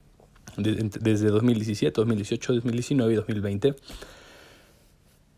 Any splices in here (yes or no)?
no